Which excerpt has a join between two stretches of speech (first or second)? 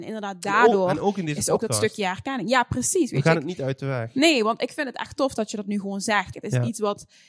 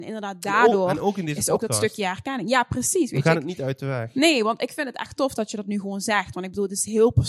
first